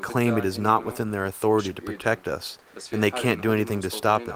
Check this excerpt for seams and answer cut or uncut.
uncut